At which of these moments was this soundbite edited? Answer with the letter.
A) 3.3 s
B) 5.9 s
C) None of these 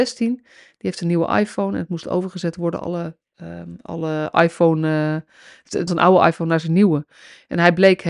B